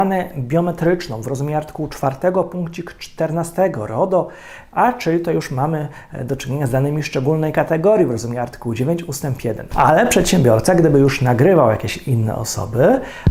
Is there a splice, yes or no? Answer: yes